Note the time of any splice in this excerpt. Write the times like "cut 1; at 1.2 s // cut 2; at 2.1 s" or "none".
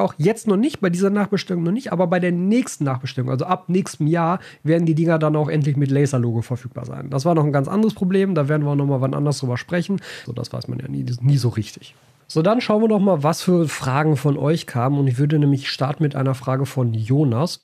cut 1; at 10.3 s